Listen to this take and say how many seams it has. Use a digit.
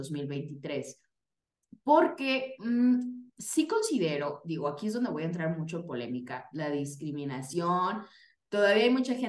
1